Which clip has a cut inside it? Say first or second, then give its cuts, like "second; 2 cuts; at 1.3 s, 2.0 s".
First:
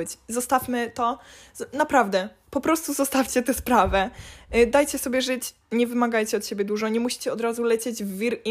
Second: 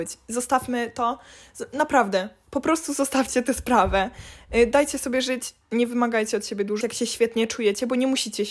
second; 1 cut; at 6.8 s